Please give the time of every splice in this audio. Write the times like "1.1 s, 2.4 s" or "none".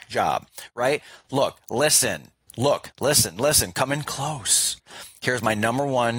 2.9 s